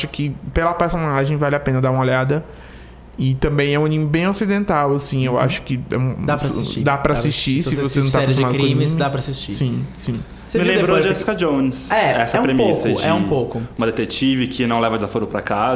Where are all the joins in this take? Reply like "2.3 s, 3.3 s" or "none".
none